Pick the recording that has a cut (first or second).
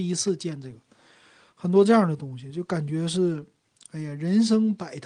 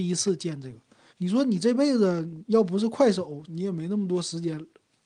second